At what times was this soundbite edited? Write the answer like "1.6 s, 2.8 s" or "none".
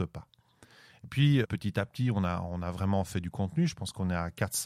1.4 s

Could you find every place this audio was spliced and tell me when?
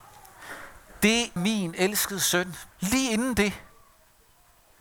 1.4 s, 2.7 s

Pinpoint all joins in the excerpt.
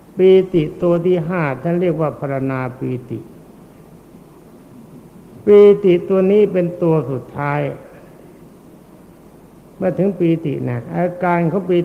none

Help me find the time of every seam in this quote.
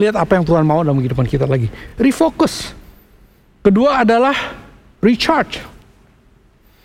none

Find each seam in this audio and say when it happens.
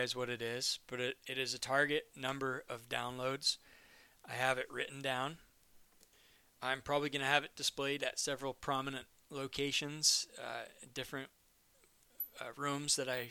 none

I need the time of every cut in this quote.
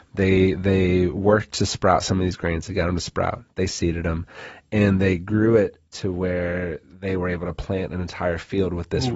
none

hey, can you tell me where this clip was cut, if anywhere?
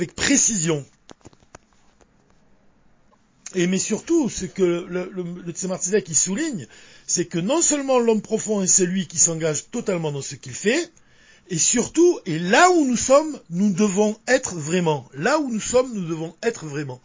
none

